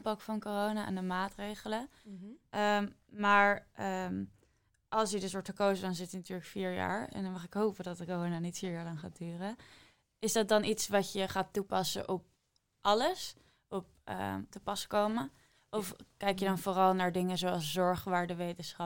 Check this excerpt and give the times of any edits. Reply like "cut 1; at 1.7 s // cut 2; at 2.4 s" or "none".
cut 1; at 14.5 s